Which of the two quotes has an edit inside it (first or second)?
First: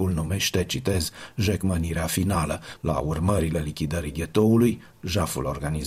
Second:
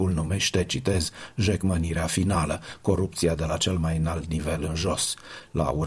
first